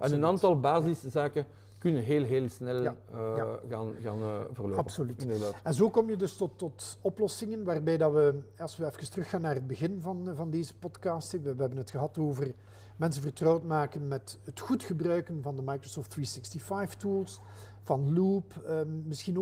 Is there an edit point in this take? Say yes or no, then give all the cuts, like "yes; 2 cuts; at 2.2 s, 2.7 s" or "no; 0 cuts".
no; 0 cuts